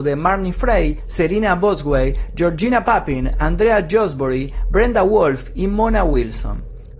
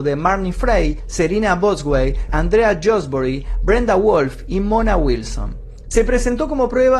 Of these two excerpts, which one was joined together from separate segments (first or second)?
second